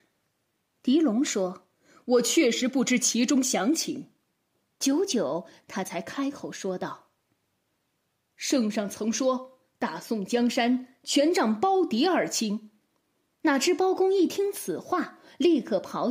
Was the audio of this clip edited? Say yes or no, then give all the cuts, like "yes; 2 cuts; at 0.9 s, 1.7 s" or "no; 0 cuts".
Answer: yes; 2 cuts; at 1.7 s, 4.7 s